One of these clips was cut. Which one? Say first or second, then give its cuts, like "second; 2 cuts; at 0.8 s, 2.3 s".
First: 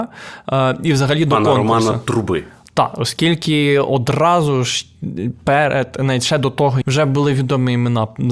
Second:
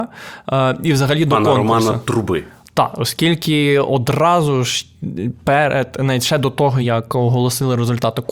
first; 1 cut; at 6.8 s